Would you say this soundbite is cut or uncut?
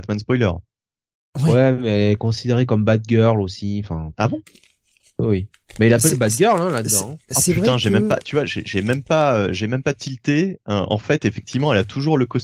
uncut